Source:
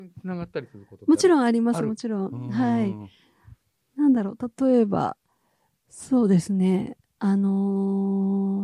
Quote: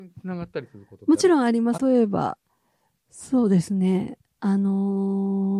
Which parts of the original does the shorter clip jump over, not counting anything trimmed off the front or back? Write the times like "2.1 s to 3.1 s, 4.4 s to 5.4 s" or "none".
1.8 s to 4.6 s